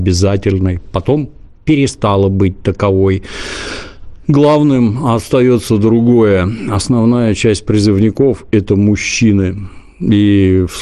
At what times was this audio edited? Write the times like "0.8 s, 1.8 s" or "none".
none